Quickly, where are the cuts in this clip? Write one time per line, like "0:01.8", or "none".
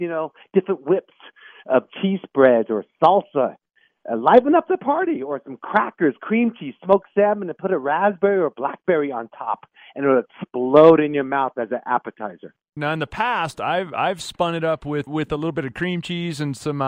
0:12.8
0:15.1